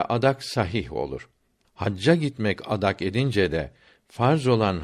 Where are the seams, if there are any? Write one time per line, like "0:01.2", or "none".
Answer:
none